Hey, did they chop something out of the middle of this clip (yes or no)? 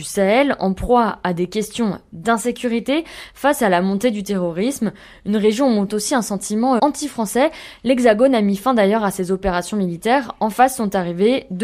yes